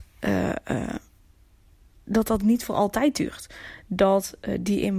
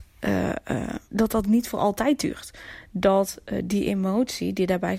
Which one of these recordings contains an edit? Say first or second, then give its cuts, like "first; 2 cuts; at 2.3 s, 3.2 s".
second; 1 cut; at 1.1 s